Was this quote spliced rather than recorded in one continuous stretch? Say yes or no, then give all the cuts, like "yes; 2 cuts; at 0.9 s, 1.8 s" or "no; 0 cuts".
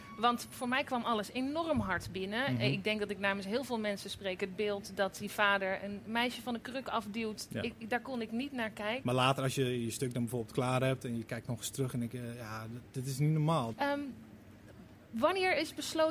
yes; 2 cuts; at 9.0 s, 13.7 s